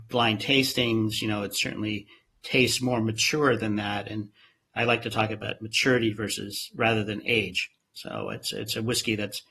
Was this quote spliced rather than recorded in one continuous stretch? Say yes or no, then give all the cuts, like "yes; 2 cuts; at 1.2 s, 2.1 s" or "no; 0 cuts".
no; 0 cuts